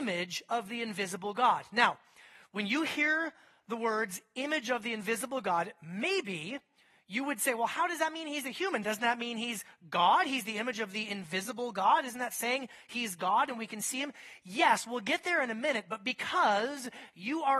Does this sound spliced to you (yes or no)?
no